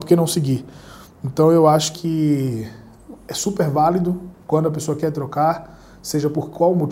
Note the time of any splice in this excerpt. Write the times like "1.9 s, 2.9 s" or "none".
1.9 s